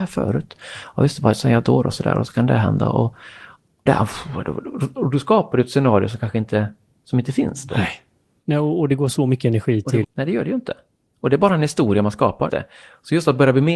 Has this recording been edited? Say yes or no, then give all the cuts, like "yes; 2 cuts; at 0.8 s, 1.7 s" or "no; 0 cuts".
yes; 3 cuts; at 3.9 s, 10.0 s, 12.5 s